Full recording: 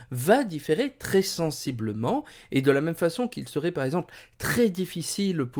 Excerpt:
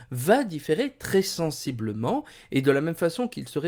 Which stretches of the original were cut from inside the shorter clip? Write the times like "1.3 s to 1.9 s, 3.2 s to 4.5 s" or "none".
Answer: none